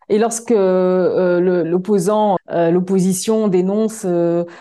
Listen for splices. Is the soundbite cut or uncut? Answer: cut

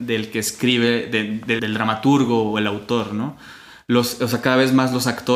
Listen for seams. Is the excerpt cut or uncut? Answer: cut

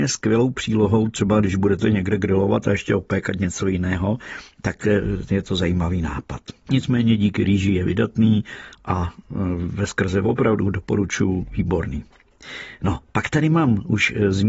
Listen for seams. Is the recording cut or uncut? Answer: cut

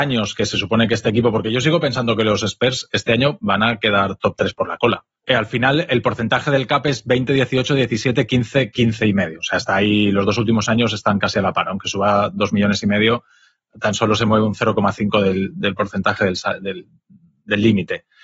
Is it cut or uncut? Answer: cut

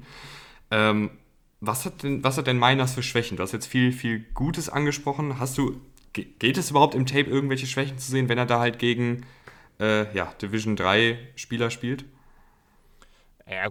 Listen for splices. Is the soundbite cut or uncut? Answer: uncut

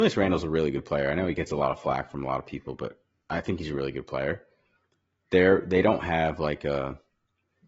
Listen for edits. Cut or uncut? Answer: uncut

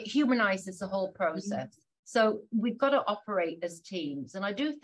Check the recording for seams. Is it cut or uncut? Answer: cut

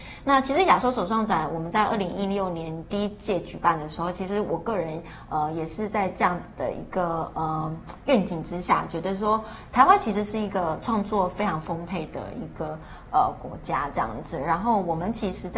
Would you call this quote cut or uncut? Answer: uncut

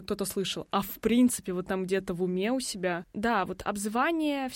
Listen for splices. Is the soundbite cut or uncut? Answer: uncut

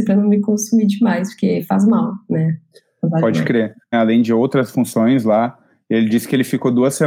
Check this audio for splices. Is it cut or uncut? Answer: cut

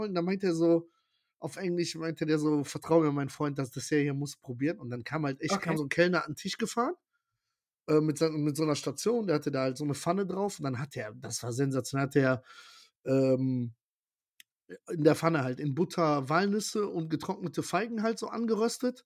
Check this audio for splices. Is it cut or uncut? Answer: cut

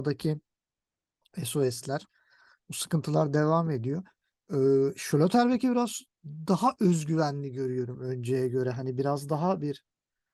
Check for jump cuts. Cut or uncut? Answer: uncut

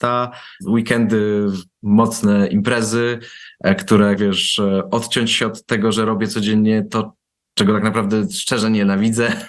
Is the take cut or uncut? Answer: cut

